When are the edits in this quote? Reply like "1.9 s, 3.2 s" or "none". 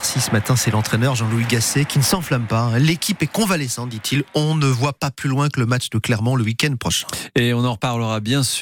none

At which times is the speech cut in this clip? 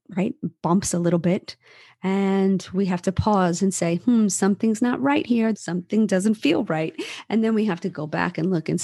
5.5 s

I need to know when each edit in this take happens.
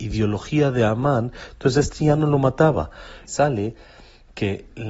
3.3 s

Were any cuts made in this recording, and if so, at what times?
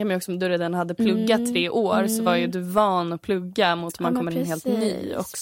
none

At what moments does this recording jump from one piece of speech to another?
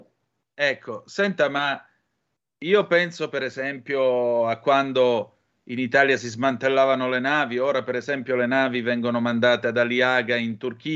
none

